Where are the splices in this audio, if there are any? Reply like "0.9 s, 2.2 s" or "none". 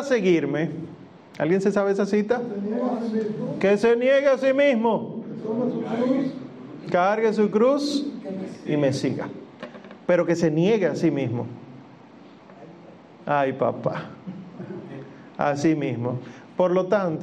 none